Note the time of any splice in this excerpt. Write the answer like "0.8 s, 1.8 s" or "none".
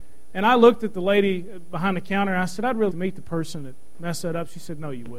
2.9 s